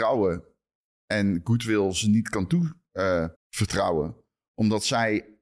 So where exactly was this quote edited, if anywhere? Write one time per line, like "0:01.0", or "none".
0:03.3

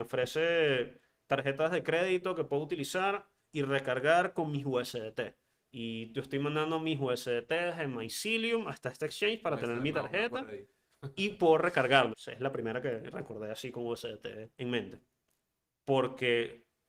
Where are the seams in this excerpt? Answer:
0:12.1
0:14.5

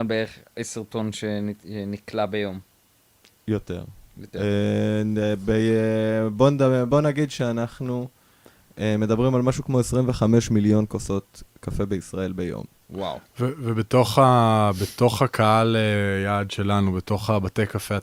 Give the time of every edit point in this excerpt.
none

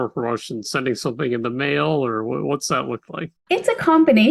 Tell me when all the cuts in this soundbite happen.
0:03.4

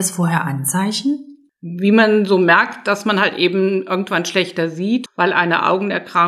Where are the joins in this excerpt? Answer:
0:05.1

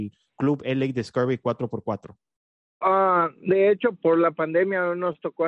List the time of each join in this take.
0:02.8
0:04.0

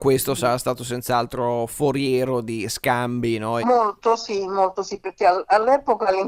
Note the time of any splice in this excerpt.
0:03.6

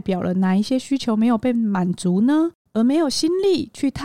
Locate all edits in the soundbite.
0:02.7

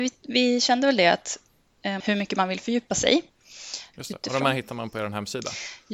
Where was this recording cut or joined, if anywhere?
0:02.0
0:03.9

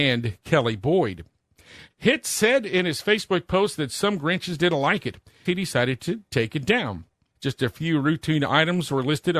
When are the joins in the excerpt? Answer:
0:01.9
0:05.5
0:07.3

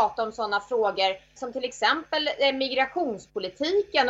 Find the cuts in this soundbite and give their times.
0:01.4

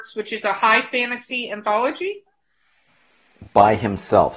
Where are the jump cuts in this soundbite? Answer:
none

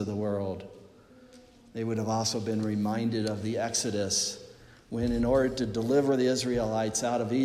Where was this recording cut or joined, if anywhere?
0:01.7

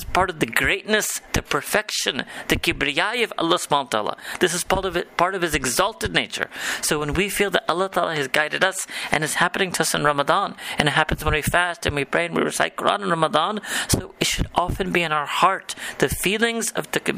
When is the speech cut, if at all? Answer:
0:01.3

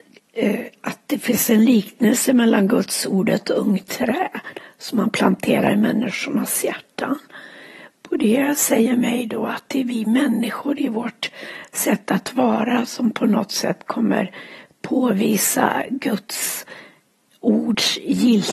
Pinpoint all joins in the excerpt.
none

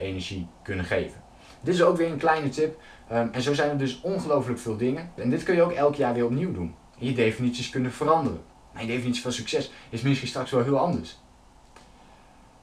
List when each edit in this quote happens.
0:05.2

